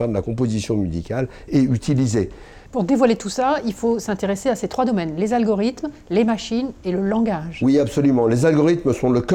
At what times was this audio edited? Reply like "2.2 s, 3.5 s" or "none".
2.7 s